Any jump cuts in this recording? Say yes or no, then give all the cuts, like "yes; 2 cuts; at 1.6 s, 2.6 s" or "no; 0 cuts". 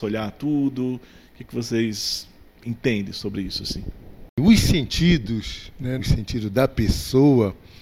yes; 1 cut; at 6.0 s